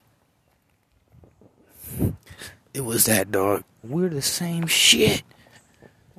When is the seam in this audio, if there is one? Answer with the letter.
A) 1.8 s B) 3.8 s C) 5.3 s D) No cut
B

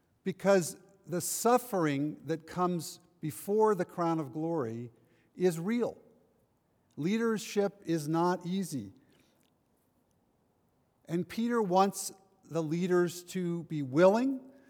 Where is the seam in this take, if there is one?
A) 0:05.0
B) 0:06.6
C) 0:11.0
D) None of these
D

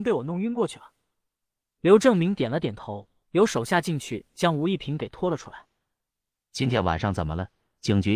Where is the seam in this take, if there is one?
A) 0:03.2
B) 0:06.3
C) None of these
A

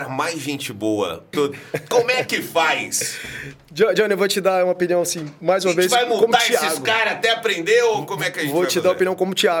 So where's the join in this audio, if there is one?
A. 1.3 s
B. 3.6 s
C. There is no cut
A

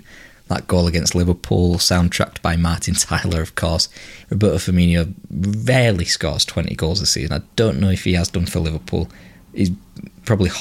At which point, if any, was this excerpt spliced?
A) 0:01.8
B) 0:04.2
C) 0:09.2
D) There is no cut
B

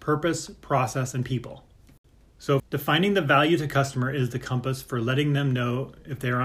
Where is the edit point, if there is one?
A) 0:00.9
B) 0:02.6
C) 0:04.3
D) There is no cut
B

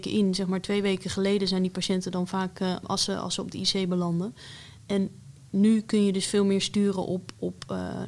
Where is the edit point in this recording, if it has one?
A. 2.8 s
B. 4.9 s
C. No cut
A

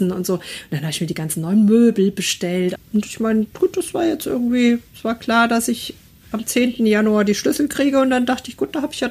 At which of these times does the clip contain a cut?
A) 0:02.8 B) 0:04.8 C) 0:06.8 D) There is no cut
A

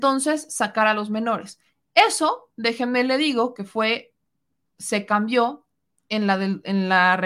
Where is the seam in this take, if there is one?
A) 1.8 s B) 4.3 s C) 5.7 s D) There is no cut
D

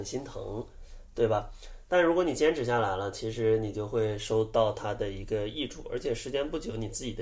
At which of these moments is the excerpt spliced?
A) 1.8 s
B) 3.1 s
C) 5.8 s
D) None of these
D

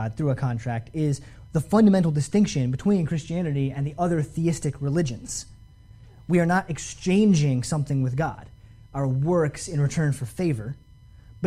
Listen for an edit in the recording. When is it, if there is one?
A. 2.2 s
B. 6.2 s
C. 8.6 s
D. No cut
D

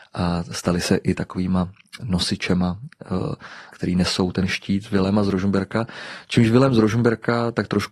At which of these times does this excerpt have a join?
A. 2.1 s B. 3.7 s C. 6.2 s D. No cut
B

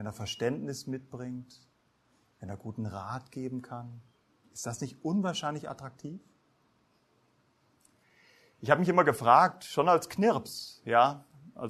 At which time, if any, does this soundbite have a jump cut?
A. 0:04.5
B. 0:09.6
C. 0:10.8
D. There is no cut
D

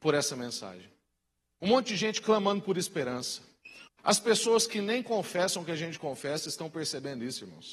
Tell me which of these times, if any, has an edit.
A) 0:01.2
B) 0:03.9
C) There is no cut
B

